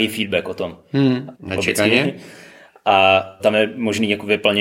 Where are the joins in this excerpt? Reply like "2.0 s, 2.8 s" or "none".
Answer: 1.3 s, 3.4 s

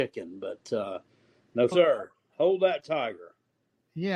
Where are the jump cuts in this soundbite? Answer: 1.7 s

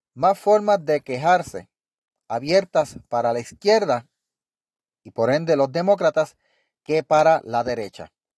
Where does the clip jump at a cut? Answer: none

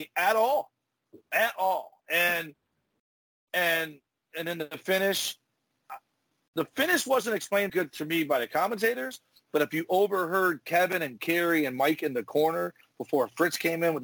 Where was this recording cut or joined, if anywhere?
7.7 s

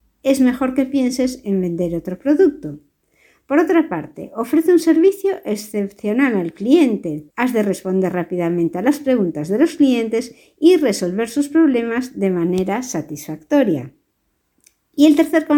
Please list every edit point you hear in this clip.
7.3 s

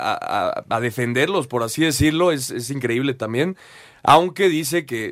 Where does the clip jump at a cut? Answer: none

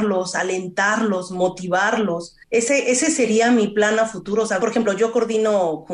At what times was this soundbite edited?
2.4 s, 4.6 s

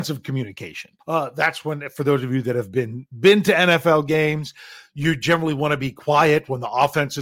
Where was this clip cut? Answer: 1.0 s

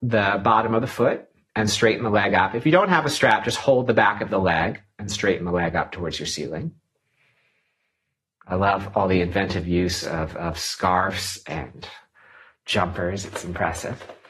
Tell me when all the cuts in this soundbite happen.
none

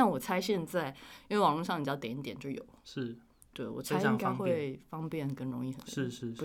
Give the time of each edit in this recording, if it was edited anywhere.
none

